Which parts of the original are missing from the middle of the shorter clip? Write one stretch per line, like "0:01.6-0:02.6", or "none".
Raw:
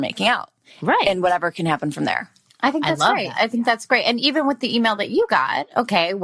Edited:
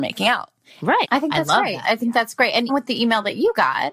0:01.0-0:02.6
0:04.2-0:04.4